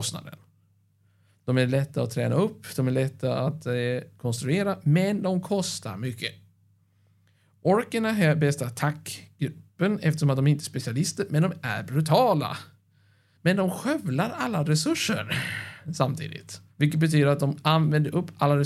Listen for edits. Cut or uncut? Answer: cut